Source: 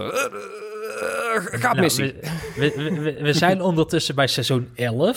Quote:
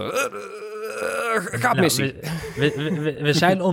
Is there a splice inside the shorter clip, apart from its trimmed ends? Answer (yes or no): no